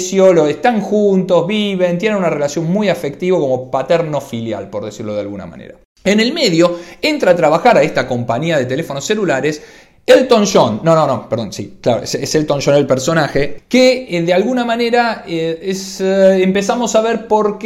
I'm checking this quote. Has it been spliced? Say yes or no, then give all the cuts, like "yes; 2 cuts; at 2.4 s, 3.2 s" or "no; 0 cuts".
no; 0 cuts